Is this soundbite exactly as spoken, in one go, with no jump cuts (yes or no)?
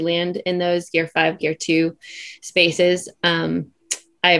no